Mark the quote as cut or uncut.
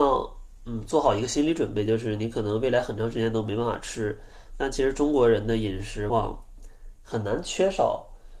cut